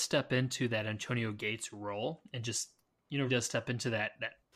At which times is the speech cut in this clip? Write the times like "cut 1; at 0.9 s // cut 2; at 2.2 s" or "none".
cut 1; at 3.3 s